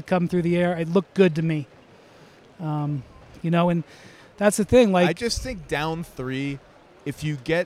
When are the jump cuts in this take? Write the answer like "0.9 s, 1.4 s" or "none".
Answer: 3.4 s

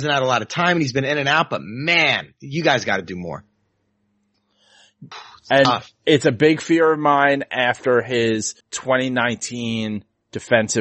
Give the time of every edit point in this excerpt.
5.1 s, 8.6 s

